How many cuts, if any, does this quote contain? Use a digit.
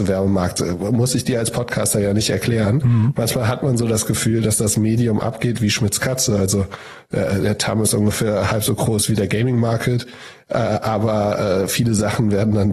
0